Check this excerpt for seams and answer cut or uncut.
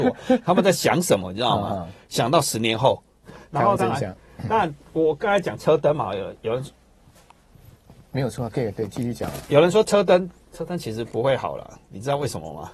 cut